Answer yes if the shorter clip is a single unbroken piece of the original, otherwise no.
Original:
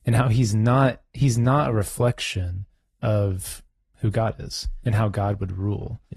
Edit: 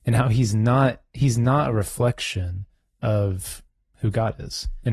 yes